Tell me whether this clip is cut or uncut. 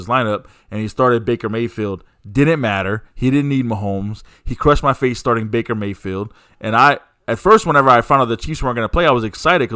uncut